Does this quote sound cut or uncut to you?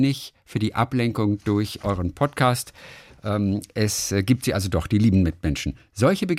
uncut